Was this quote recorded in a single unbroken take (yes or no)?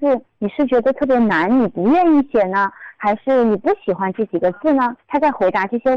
no